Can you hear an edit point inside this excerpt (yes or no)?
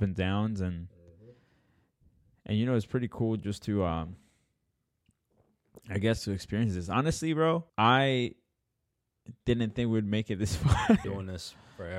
yes